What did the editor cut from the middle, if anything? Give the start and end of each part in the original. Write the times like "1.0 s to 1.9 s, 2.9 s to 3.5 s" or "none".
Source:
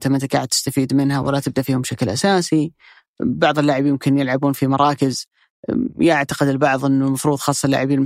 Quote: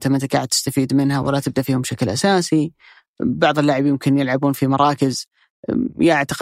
none